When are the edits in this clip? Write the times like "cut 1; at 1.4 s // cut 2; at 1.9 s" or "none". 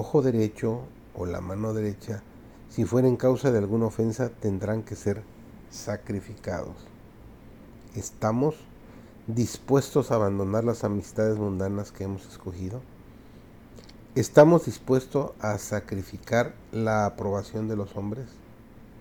none